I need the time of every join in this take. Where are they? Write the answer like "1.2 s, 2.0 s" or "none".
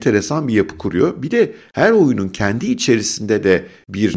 none